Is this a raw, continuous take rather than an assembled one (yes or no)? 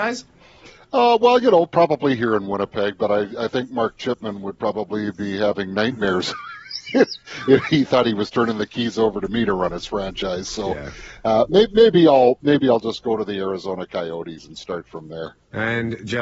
yes